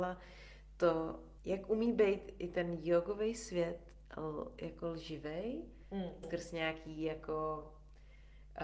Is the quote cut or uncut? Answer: cut